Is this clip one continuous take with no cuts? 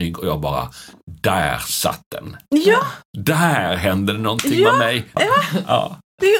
no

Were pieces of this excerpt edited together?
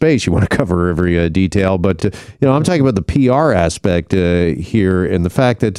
no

